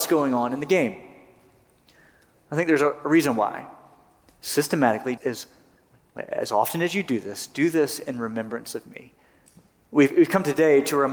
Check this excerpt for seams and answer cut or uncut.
cut